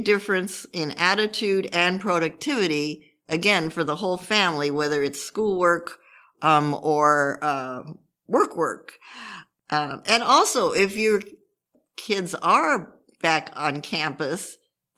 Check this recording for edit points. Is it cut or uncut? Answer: uncut